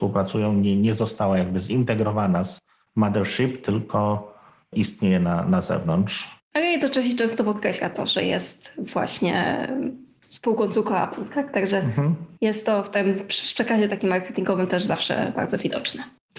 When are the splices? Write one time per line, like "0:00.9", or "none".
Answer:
none